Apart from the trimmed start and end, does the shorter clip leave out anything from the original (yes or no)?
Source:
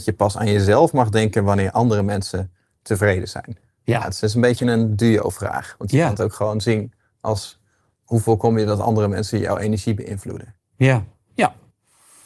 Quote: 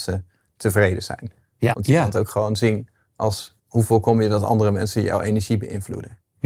yes